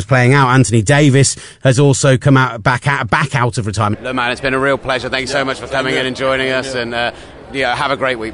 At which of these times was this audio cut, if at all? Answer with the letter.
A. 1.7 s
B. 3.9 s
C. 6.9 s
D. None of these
B